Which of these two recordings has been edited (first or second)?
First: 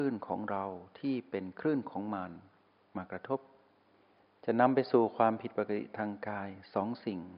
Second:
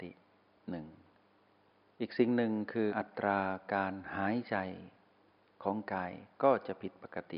second